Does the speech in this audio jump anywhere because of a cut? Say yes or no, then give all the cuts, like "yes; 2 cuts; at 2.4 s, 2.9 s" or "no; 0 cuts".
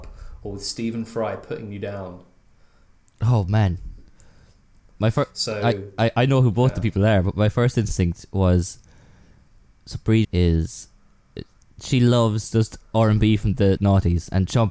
yes; 2 cuts; at 10.2 s, 13.8 s